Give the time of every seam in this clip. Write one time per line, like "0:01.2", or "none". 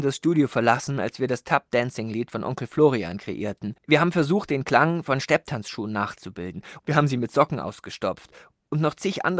0:03.8
0:06.8